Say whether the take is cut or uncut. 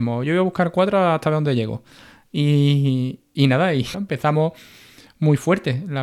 cut